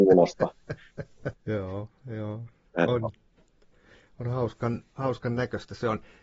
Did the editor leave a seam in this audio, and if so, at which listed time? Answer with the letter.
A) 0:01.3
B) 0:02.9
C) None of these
A